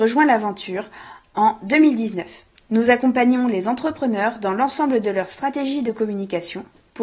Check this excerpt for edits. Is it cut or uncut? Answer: uncut